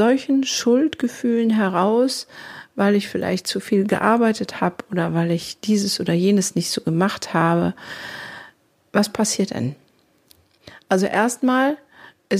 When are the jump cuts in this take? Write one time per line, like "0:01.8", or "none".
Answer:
none